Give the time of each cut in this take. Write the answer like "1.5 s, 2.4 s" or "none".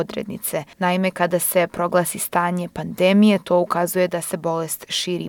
none